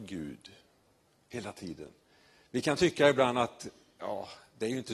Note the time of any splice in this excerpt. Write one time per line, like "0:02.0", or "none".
none